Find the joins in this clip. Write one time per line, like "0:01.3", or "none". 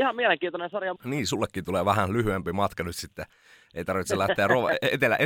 0:01.0